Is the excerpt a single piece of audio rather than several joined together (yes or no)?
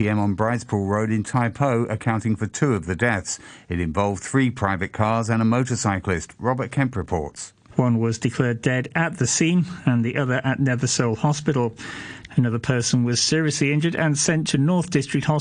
no